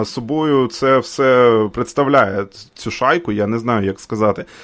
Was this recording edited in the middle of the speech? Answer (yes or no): yes